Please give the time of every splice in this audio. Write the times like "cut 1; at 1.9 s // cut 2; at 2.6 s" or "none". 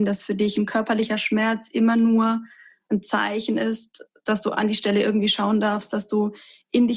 none